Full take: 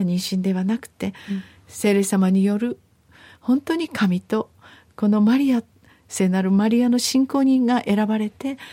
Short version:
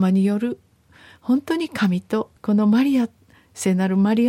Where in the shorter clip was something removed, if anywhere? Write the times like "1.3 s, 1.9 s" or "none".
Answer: 2.4 s